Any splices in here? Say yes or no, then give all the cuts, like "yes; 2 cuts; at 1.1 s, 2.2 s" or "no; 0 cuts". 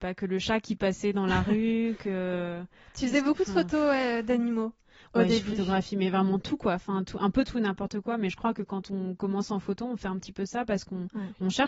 no; 0 cuts